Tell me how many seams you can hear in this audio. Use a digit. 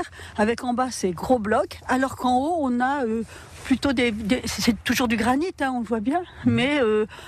0